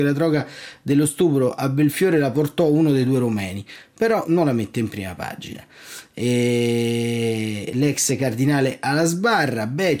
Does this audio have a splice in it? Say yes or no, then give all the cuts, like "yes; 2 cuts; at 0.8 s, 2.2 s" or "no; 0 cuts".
no; 0 cuts